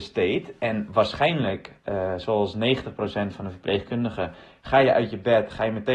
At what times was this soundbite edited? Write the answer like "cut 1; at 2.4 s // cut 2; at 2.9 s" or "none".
none